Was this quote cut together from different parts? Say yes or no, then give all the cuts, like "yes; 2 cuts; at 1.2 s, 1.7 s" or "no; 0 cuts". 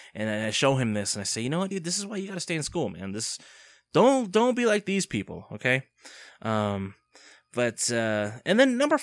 no; 0 cuts